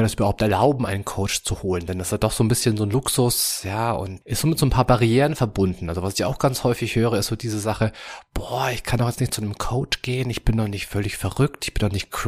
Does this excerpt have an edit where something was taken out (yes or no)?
yes